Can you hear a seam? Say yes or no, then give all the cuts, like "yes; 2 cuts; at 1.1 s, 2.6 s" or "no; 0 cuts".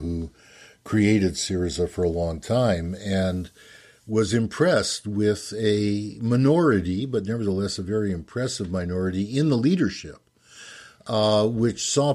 no; 0 cuts